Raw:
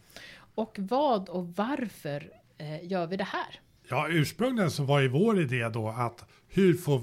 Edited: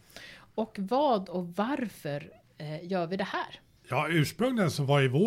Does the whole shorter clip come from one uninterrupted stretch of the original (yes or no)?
yes